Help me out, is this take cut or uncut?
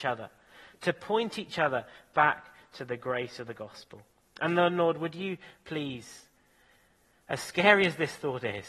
uncut